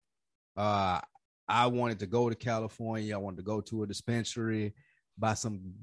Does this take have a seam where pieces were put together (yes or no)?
no